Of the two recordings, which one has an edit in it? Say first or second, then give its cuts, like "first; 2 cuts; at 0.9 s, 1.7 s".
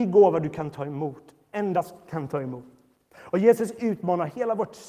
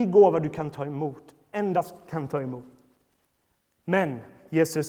first; 1 cut; at 3.1 s